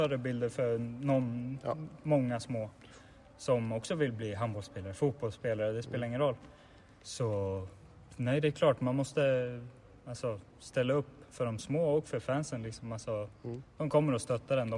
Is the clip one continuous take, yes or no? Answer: yes